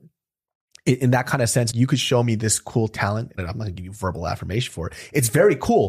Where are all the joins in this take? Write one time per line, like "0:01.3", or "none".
0:01.7
0:03.4